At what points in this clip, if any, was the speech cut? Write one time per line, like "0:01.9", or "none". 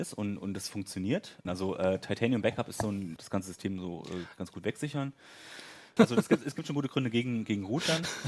0:01.5
0:03.2
0:06.0

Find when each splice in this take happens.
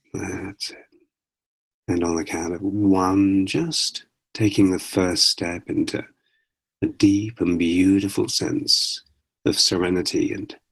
0:01.7

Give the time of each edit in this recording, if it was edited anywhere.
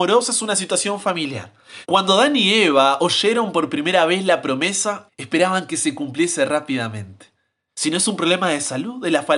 0:01.8
0:05.1
0:07.7

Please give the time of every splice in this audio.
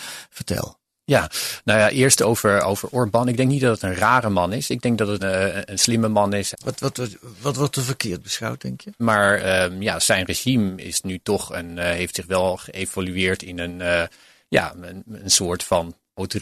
0:05.2
0:06.5
0:09.0

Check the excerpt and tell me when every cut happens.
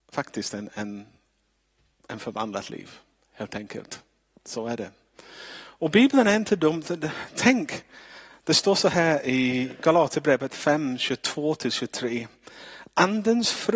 none

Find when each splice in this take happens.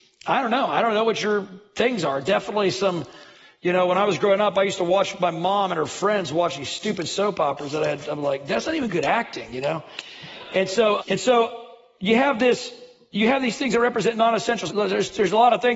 0:11.0
0:14.7

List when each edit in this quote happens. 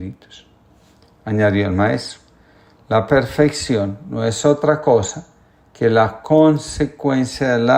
none

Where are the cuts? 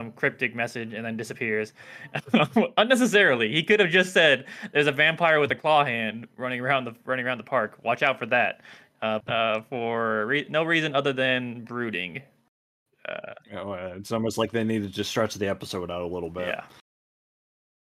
0:09.2

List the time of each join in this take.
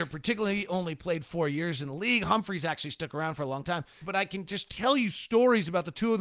0:04.0

